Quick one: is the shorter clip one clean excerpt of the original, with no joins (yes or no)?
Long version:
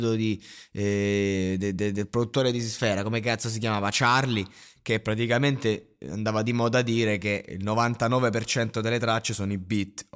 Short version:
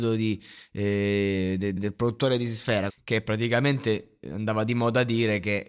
no